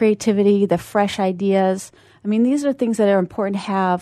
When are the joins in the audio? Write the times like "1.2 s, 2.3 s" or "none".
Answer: none